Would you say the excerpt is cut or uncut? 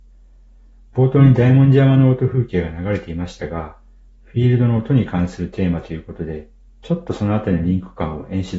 uncut